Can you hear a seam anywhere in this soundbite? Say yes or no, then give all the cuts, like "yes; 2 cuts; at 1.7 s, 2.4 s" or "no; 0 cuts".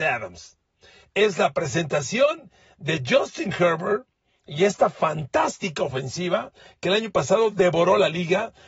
no; 0 cuts